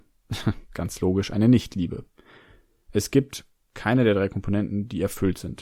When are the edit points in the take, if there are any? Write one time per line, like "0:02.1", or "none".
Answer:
none